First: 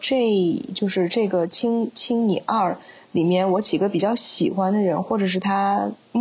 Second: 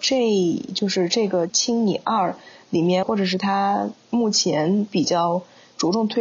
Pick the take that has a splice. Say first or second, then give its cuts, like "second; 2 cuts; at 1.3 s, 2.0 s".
second; 2 cuts; at 1.5 s, 3.0 s